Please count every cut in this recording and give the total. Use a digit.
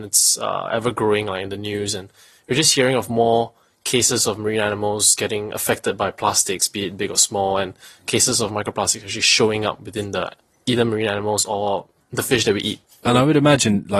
0